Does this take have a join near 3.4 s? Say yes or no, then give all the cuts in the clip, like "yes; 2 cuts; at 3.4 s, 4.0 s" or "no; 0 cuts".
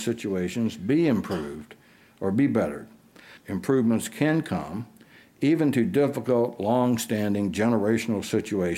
yes; 1 cut; at 3.4 s